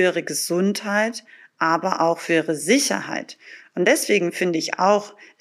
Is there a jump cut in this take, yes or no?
no